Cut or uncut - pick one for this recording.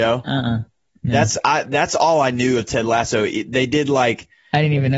uncut